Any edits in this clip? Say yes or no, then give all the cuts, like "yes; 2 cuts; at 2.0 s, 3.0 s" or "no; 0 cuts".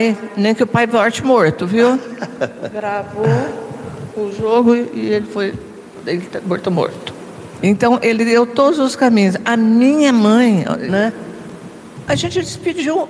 yes; 3 cuts; at 7.6 s, 10.9 s, 12.1 s